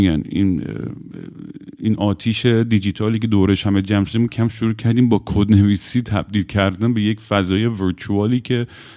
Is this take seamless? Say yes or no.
no